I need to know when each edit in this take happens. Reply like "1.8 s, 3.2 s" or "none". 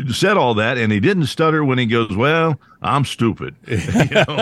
none